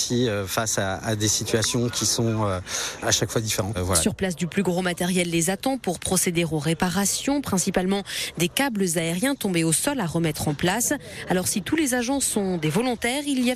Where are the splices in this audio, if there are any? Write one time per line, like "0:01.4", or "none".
0:03.7